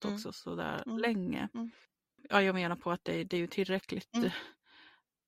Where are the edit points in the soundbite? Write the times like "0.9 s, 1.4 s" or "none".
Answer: none